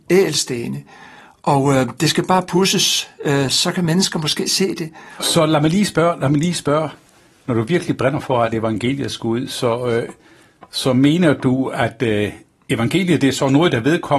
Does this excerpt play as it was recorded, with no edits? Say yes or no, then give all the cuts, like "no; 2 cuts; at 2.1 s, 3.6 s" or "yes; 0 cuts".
yes; 0 cuts